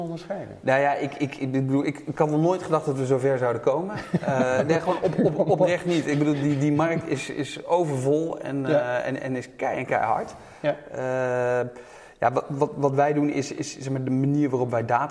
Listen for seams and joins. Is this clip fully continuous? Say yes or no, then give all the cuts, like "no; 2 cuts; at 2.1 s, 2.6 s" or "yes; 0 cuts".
yes; 0 cuts